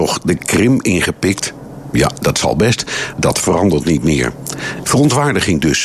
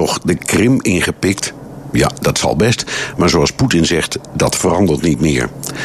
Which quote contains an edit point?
first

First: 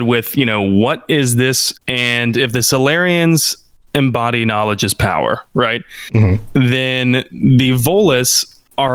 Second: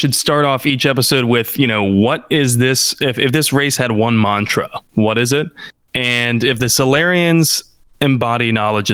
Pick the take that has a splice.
first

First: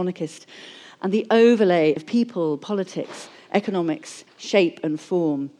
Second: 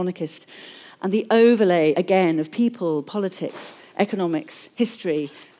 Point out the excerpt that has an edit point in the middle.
first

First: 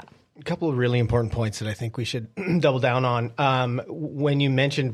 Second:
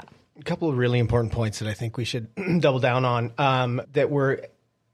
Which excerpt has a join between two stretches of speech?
second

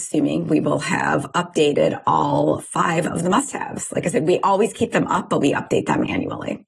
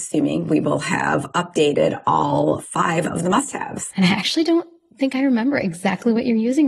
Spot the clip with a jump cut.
second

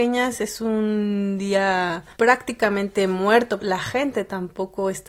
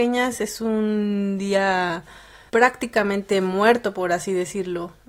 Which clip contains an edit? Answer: first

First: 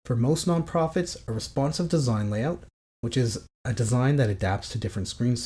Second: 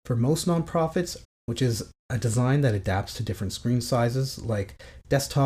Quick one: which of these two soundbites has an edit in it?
second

